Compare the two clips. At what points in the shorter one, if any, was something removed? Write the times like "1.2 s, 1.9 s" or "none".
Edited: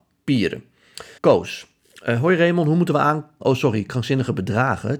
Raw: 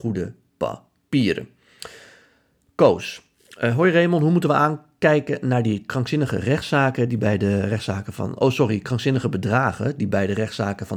1.2 s, 3.4 s